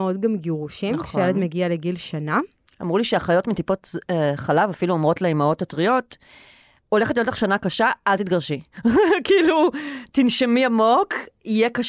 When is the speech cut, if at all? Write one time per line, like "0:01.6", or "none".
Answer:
none